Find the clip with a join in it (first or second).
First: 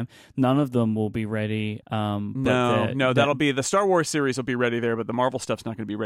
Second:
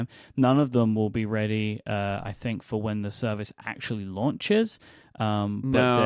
first